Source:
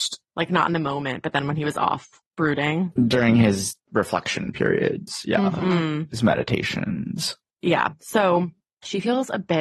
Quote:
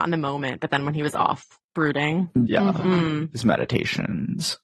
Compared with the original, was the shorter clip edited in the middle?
yes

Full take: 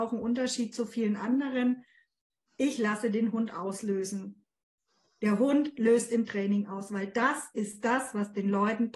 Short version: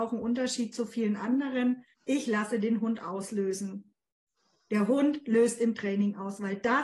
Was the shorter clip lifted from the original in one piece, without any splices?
no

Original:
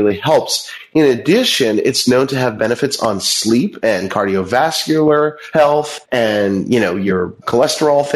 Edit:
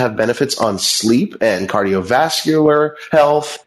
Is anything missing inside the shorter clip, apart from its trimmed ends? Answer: no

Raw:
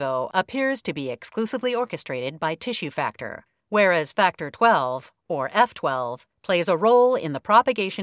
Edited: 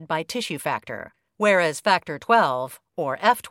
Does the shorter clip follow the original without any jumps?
yes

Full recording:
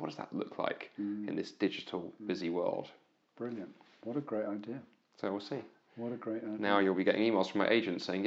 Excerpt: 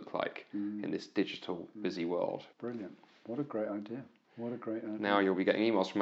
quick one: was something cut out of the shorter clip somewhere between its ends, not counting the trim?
yes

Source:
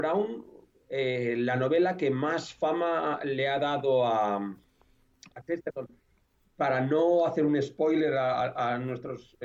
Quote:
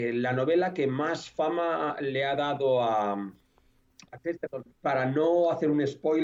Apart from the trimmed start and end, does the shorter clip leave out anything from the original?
yes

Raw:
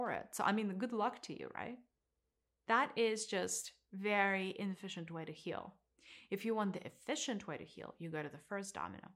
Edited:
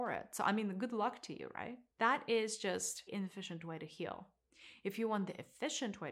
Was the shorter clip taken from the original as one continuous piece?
no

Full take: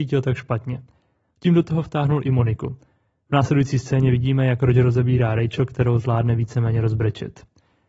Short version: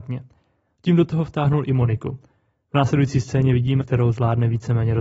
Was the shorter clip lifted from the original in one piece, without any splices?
no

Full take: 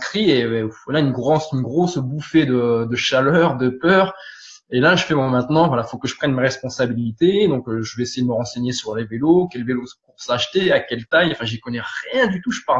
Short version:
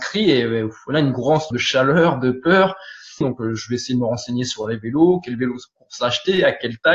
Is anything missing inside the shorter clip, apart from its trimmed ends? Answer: yes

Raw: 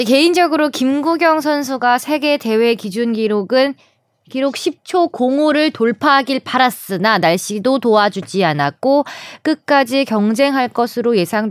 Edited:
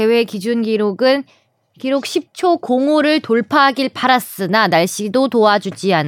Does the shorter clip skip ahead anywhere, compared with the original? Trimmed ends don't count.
no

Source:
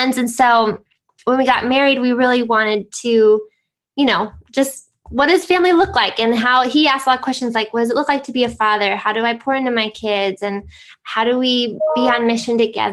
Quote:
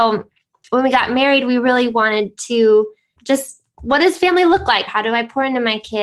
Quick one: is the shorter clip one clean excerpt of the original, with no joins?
no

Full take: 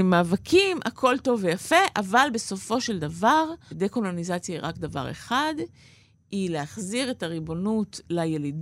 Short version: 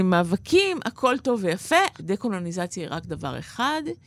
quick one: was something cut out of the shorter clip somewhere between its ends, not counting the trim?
yes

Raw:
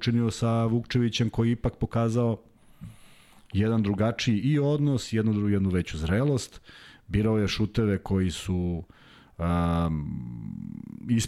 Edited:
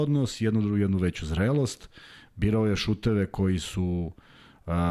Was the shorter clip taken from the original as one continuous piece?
yes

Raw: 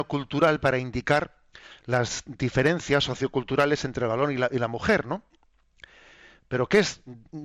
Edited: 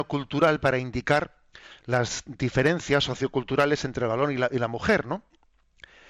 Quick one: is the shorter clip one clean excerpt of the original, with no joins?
yes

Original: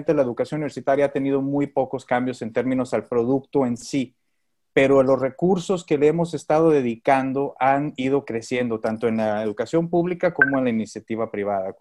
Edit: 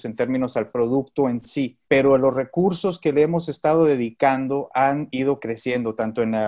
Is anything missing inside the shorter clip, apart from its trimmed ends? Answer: yes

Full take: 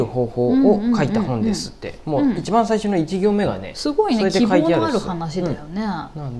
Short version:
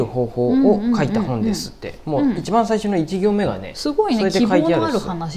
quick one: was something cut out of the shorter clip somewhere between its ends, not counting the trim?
no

